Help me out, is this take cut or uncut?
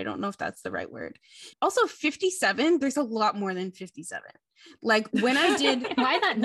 uncut